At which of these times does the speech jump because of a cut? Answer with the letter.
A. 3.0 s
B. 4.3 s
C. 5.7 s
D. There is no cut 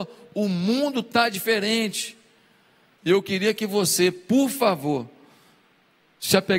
A